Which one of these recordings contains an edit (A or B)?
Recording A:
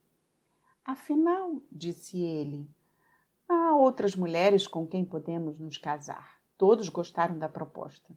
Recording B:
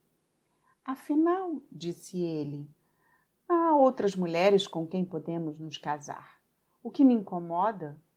A